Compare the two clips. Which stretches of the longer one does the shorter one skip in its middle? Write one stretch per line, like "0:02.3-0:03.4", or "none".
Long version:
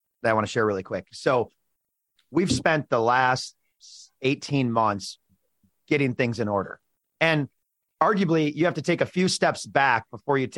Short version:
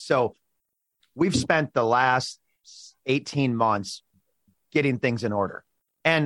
none